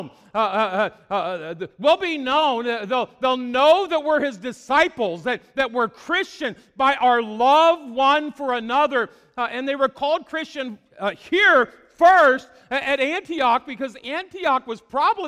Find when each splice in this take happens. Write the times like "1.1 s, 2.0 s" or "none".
none